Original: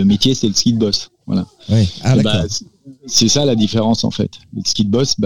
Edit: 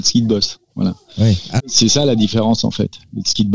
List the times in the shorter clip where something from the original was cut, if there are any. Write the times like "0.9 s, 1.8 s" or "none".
1.6 s